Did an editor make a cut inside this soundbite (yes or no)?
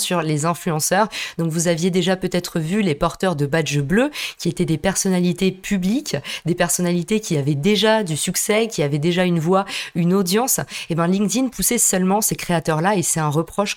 no